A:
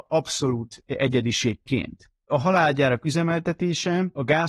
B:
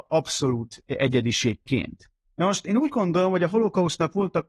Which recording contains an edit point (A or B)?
A